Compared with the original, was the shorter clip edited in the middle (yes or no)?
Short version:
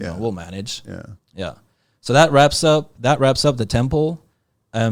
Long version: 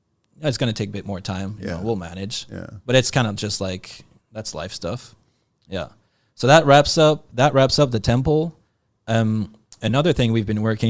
yes